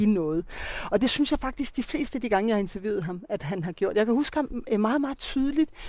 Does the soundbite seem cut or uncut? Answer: uncut